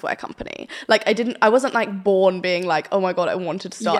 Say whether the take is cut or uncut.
uncut